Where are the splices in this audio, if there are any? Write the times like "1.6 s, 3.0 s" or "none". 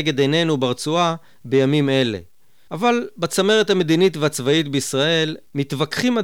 2.7 s